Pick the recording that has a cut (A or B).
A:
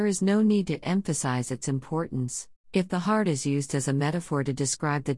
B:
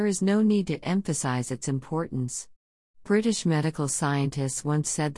A